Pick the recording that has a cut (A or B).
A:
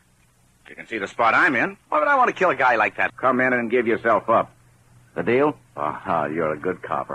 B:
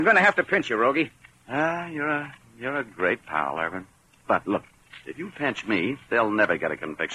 A